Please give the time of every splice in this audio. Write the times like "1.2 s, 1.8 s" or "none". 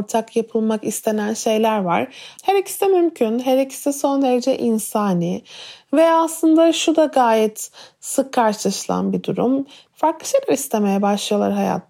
2.3 s, 9.9 s